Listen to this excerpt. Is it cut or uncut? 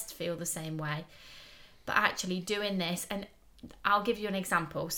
uncut